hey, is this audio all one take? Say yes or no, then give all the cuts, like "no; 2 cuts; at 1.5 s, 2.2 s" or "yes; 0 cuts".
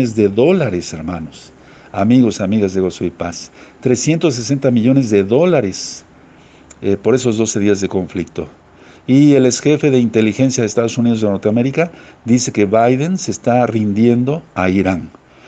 yes; 0 cuts